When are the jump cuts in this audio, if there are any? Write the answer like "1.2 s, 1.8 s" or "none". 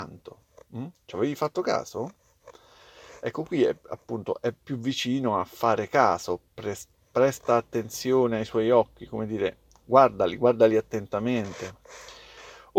none